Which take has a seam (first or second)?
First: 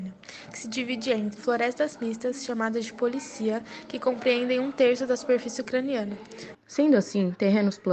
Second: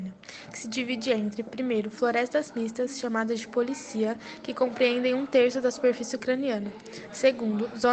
first